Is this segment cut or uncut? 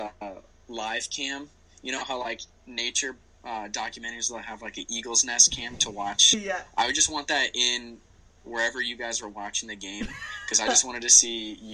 uncut